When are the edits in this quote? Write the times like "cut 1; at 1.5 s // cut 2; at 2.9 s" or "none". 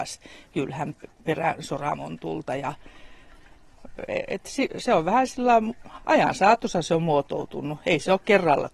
none